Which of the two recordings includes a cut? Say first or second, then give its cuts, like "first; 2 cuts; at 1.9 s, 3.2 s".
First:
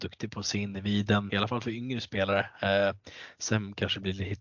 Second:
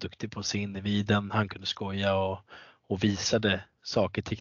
first; 1 cut; at 1.3 s